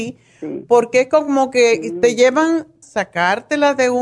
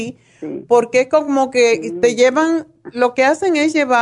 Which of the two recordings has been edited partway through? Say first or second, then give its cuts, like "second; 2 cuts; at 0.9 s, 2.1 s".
first; 1 cut; at 2.8 s